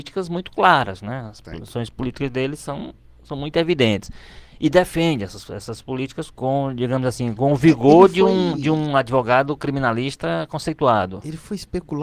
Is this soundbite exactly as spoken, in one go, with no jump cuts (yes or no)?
no